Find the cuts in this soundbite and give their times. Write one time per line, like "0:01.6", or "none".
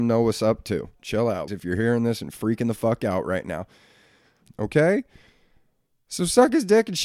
0:01.5
0:04.5